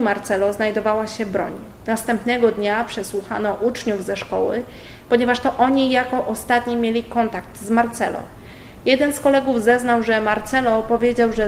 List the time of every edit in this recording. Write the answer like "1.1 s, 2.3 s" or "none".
none

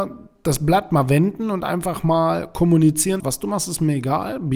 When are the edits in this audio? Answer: 3.2 s

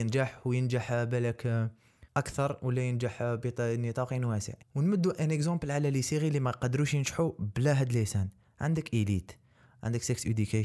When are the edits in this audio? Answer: 2.1 s, 4.6 s

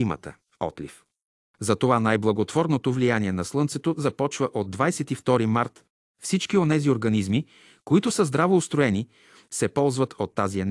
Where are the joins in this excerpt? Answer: none

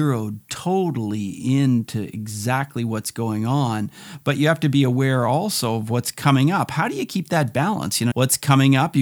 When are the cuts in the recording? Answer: 8.1 s

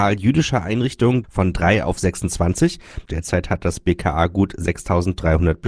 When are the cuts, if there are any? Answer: 1.2 s, 3.1 s

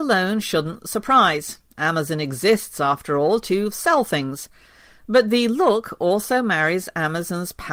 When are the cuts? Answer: none

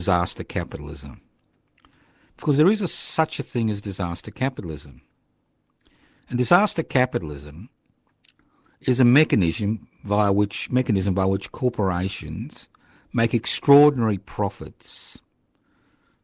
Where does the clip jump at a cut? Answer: none

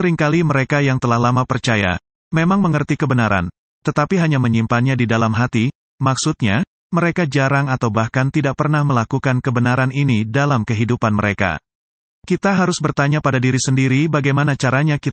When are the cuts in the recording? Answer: 12.1 s

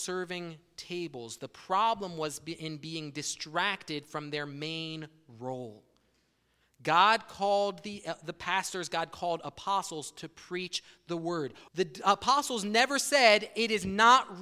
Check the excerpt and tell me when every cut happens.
11.7 s

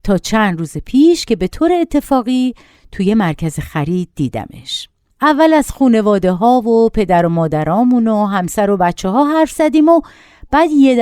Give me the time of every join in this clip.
5.1 s

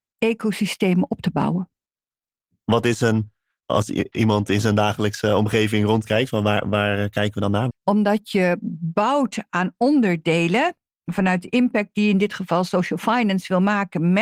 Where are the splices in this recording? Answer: 2.6 s, 7.7 s

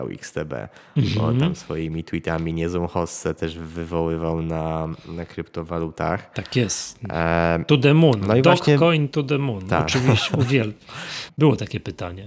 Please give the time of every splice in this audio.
11.3 s

